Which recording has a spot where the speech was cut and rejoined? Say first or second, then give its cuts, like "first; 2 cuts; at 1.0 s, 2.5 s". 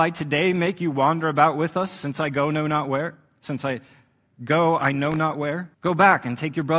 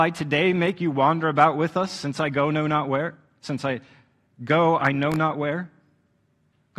first; 1 cut; at 5.7 s